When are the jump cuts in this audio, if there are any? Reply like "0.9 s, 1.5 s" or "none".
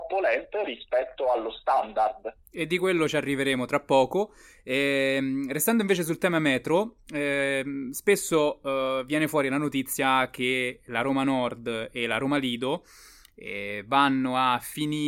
none